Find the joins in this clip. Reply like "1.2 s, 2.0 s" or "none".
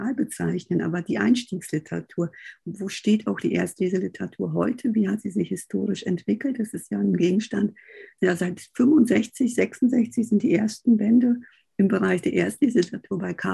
2.6 s

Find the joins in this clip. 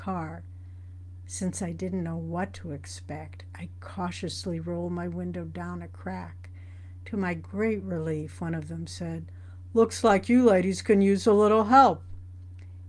none

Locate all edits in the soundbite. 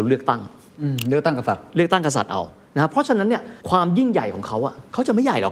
3.6 s

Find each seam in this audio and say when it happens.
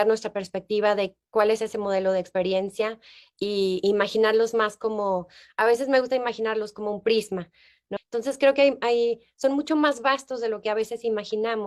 8.0 s

